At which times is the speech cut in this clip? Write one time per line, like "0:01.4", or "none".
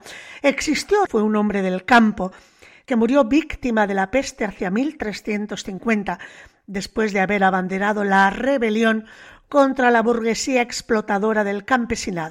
0:01.1